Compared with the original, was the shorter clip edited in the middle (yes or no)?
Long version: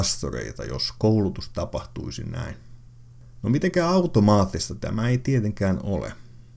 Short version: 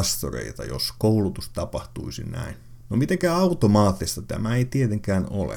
yes